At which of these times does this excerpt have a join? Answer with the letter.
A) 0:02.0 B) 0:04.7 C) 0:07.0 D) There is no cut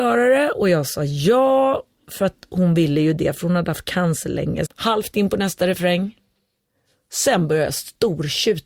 B